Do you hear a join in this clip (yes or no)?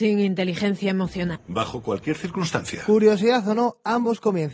yes